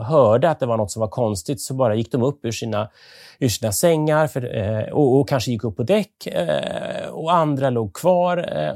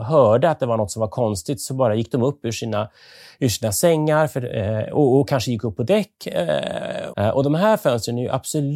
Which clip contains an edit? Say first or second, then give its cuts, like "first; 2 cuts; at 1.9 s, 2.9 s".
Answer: second; 1 cut; at 7.1 s